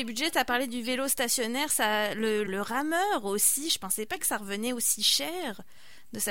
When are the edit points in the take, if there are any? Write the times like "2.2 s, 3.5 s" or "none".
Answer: 2.5 s